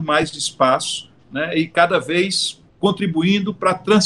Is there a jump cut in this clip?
yes; 1 cut; at 2.7 s

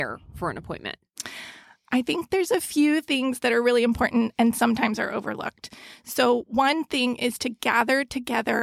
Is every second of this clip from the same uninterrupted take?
yes; 0 cuts

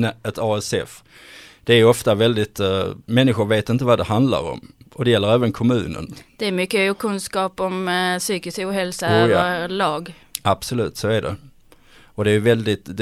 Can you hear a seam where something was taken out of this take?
no; 0 cuts

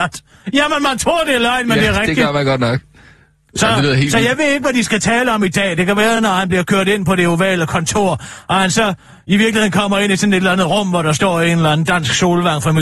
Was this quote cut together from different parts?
no; 0 cuts

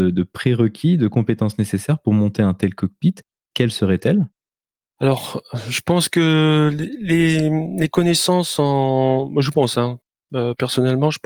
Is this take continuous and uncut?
yes; 0 cuts

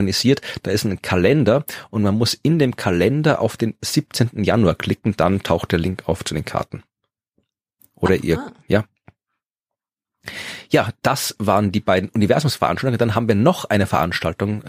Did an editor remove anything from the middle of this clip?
no; 0 cuts

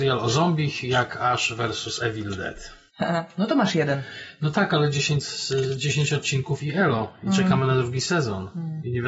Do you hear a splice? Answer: no; 0 cuts

